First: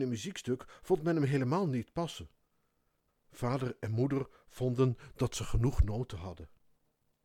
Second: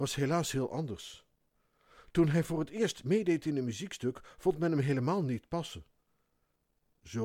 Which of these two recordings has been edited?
first; 1 cut; at 3.1 s

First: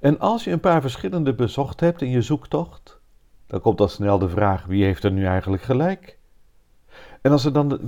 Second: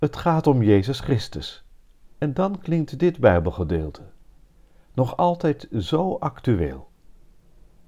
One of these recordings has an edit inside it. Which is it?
second; 1 cut; at 2.0 s

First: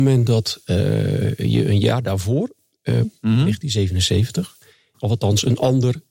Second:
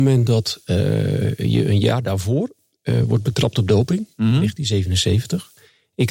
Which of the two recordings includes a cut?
first; 2 cuts; at 3.0 s, 4.9 s

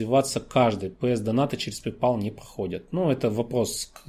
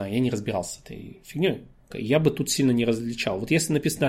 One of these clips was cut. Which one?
second; 1 cut; at 1.9 s

